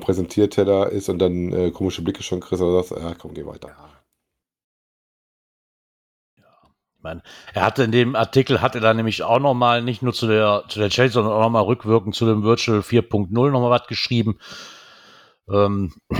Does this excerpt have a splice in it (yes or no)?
no